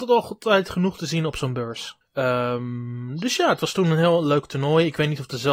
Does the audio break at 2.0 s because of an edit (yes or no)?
yes